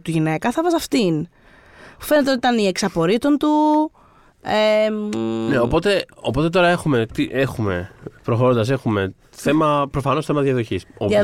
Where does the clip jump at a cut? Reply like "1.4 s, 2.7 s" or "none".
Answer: none